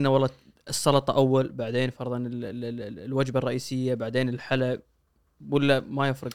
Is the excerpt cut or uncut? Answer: uncut